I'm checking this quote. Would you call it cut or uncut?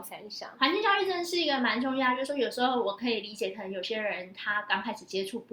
uncut